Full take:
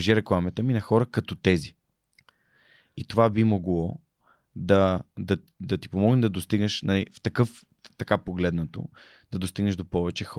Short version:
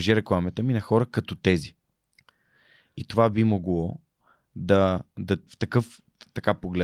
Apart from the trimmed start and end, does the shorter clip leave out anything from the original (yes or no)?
yes